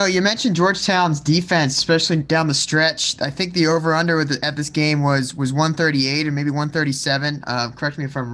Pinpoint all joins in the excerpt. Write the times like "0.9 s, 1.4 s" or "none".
none